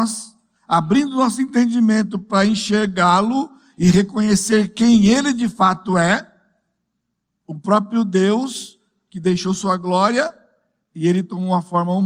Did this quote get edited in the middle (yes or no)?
no